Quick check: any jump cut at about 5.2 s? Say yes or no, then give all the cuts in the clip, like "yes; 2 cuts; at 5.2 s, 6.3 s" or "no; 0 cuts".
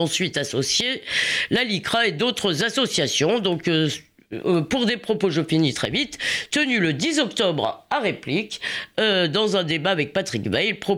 no; 0 cuts